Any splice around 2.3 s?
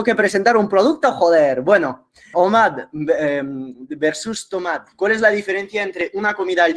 yes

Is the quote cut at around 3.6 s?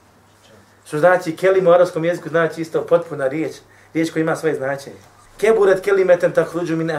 no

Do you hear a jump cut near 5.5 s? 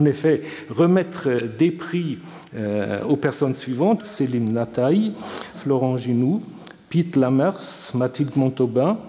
yes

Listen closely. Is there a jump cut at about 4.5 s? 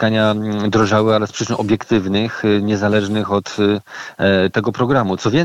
yes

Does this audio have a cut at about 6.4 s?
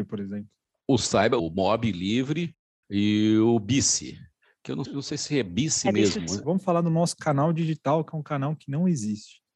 yes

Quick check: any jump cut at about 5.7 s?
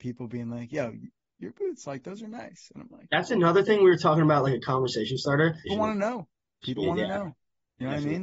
yes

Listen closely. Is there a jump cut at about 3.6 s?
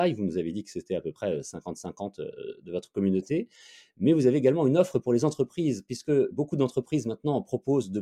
no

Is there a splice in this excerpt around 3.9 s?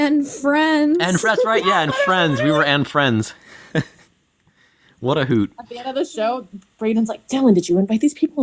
no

